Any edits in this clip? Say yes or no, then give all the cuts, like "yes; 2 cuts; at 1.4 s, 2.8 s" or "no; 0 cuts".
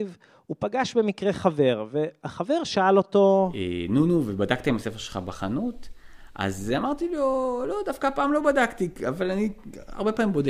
no; 0 cuts